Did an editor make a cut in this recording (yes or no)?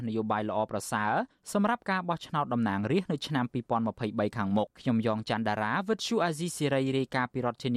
yes